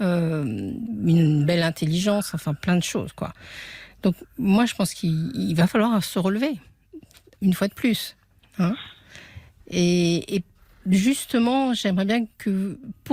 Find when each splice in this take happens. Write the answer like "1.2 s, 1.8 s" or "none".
none